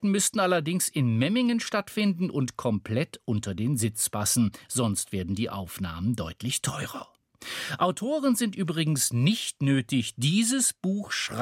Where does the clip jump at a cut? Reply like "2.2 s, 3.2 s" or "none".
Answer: none